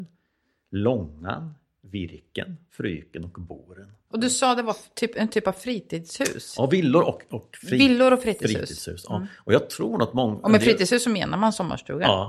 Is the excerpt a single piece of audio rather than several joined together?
no; 2 cuts; at 2.7 s, 4.1 s

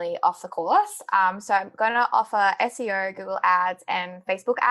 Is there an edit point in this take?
no; 0 cuts

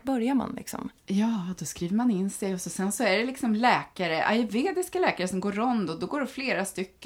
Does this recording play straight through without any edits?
no; 1 cut; at 1.0 s

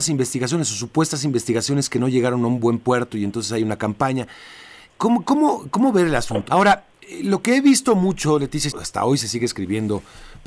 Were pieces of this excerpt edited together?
yes; 2 cuts; at 6.5 s, 8.7 s

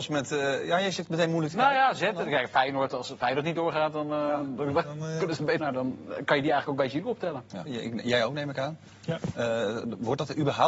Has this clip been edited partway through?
yes; 2 cuts; at 5.6 s, 7.7 s

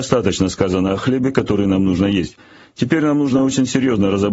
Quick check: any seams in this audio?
no; 0 cuts

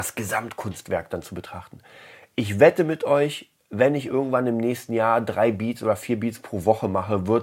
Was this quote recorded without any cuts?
yes; 0 cuts

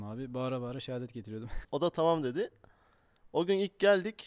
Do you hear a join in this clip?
yes; 1 cut; at 1.6 s

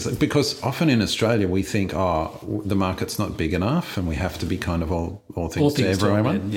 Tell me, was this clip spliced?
no; 0 cuts

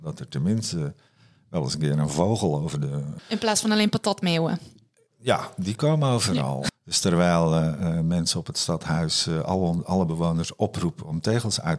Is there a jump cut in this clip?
yes; 2 cuts; at 3.2 s, 6.7 s

